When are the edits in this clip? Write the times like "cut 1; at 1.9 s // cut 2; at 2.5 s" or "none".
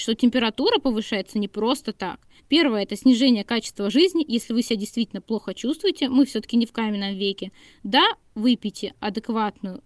cut 1; at 2.4 s